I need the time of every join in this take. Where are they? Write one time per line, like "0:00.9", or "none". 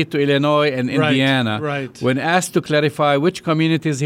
none